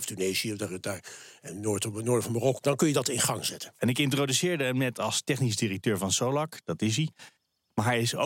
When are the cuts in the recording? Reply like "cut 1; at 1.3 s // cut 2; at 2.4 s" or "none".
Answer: cut 1; at 2.6 s // cut 2; at 3.8 s